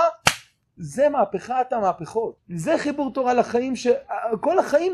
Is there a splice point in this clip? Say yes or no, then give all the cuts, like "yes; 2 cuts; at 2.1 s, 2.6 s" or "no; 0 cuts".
yes; 1 cut; at 2.4 s